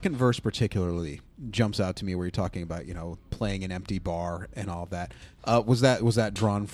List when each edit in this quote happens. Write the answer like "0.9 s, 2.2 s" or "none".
none